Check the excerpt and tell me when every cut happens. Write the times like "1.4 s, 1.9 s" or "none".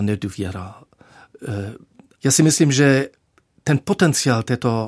2.2 s